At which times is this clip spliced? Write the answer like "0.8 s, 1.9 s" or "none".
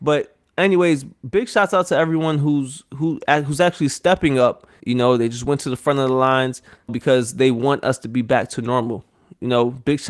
4.8 s, 6.9 s